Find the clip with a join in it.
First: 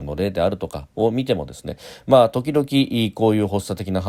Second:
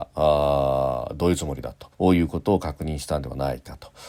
second; 1 cut; at 1.9 s

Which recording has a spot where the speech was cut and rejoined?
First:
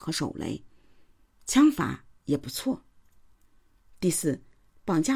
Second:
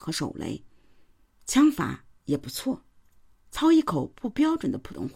second; 1 cut; at 3.4 s

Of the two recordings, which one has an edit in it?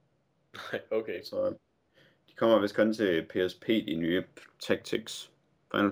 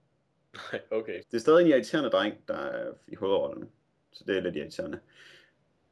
second; 1 cut; at 1.2 s

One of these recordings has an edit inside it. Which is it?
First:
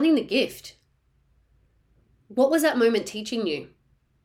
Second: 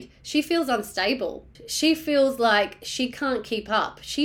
second; 1 cut; at 1.6 s

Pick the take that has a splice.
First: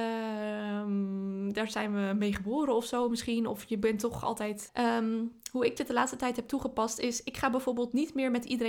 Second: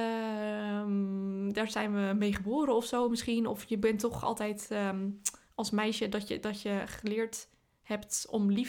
first; 1 cut; at 4.7 s

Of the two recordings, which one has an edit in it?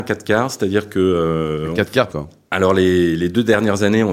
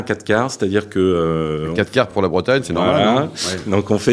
first; 1 cut; at 2.1 s

